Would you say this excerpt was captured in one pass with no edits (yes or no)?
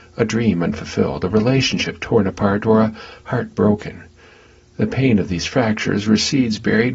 yes